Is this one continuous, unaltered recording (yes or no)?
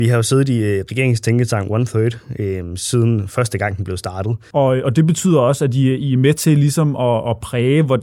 no